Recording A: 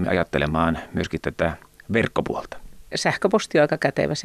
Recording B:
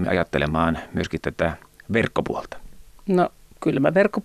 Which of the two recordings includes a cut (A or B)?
A